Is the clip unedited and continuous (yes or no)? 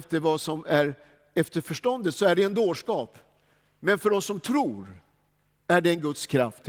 yes